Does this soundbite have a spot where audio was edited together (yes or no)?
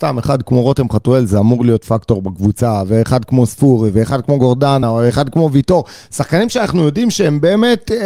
no